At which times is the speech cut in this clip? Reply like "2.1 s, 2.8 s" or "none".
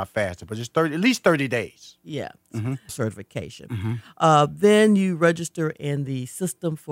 2.9 s